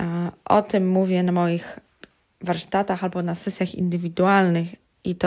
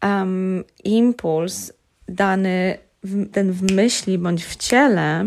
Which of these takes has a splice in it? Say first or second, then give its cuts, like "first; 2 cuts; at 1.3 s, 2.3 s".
second; 1 cut; at 3.3 s